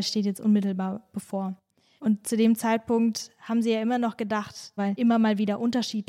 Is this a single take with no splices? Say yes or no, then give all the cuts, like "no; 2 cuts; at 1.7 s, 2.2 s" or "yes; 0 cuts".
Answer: no; 2 cuts; at 2.0 s, 4.8 s